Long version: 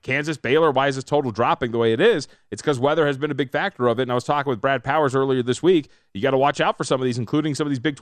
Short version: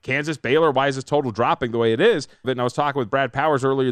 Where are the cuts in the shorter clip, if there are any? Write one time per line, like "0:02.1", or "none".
0:02.4